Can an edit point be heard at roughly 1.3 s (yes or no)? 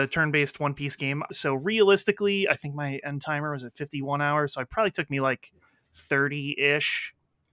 yes